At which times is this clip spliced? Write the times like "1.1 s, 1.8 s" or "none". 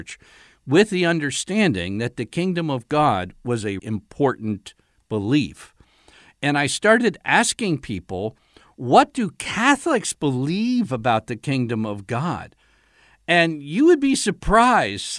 3.8 s